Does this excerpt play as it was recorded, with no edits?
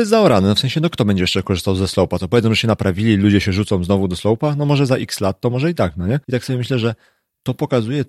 no; 1 cut; at 6.2 s

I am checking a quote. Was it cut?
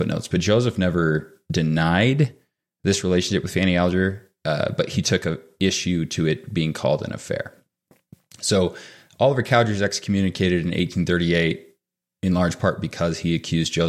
no; 0 cuts

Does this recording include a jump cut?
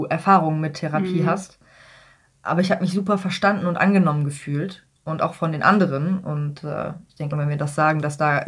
yes; 1 cut; at 7.3 s

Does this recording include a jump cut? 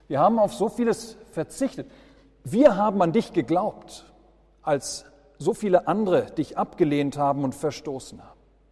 no; 0 cuts

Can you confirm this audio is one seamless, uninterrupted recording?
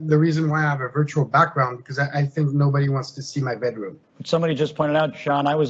no; 1 cut; at 4.0 s

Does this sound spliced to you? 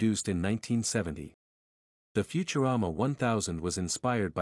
no; 0 cuts

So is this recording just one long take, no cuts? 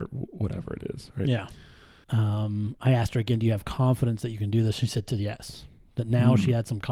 no; 1 cut; at 2.0 s

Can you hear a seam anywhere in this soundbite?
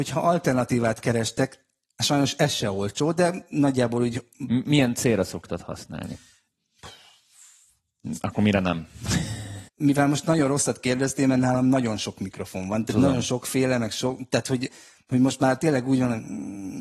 yes; 1 cut; at 9.7 s

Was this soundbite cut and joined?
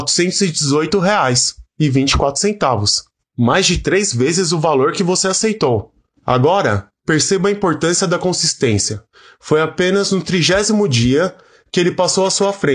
no; 0 cuts

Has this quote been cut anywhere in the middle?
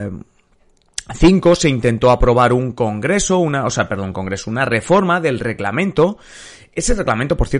no; 0 cuts

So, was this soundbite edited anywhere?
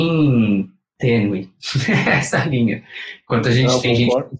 no; 0 cuts

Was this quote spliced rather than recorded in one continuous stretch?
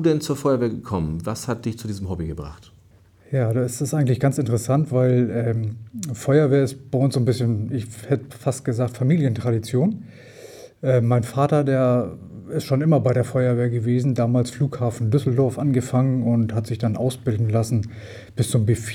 no; 0 cuts

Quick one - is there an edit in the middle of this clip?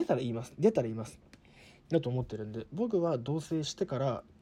no; 0 cuts

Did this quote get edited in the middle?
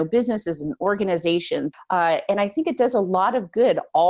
yes; 1 cut; at 1.7 s

